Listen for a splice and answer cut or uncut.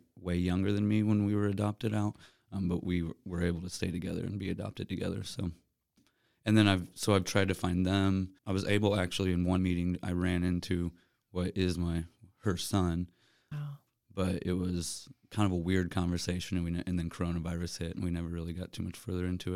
cut